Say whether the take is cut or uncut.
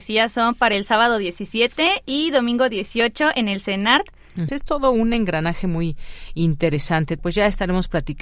cut